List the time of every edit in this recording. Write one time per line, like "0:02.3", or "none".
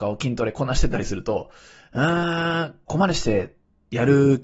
0:02.9